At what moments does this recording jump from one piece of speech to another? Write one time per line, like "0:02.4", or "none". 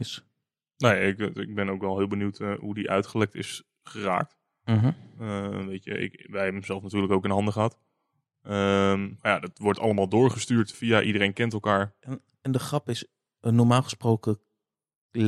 0:10.7